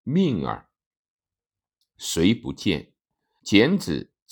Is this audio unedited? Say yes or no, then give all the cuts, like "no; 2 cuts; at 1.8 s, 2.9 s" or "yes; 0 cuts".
no; 1 cut; at 3.4 s